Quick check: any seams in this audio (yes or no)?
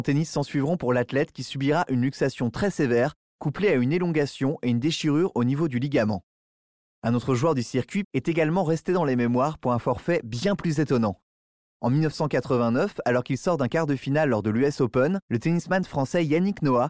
yes